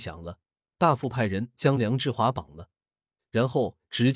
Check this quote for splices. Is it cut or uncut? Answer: cut